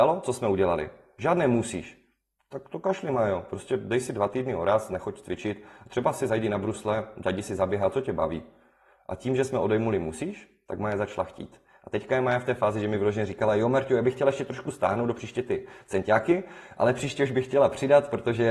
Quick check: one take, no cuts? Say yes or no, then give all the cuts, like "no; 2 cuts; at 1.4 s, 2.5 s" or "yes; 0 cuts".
yes; 0 cuts